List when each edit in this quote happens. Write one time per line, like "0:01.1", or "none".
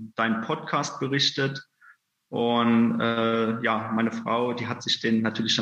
none